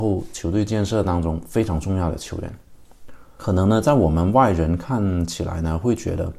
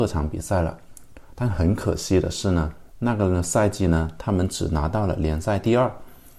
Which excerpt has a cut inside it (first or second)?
first